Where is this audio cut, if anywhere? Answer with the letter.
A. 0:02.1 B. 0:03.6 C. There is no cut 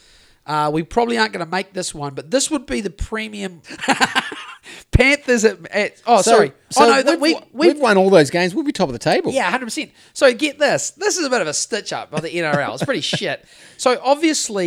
B